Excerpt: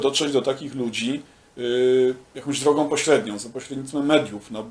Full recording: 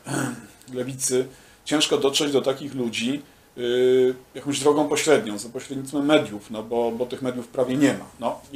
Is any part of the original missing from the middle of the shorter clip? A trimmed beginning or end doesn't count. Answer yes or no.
no